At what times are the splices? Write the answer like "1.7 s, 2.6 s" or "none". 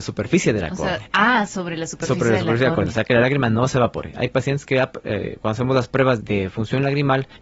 6.2 s